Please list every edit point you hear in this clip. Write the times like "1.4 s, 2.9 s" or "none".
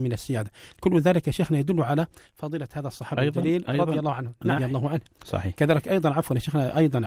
4.6 s